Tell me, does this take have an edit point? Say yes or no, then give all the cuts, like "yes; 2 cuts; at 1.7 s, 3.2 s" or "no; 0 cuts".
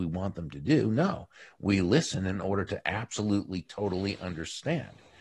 no; 0 cuts